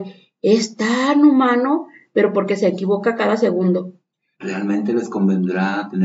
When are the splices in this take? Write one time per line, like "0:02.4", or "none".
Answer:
0:04.3